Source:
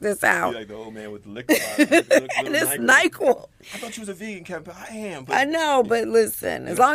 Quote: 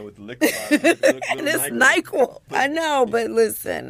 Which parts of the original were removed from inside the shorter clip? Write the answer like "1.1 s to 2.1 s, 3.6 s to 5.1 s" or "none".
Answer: 3.5 s to 5.2 s